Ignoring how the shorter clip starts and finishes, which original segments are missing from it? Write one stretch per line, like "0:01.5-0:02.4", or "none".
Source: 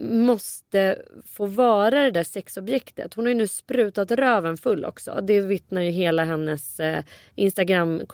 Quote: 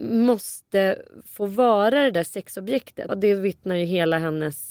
0:03.1-0:05.1